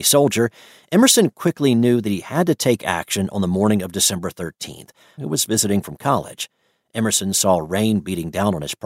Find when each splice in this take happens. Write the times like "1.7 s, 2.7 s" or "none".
5.2 s